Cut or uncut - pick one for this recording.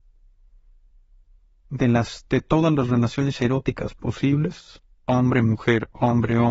cut